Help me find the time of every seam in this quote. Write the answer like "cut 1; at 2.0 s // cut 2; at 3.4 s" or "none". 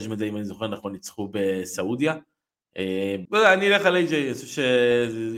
cut 1; at 3.3 s

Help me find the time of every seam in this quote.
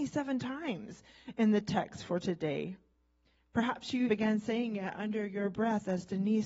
cut 1; at 4.1 s

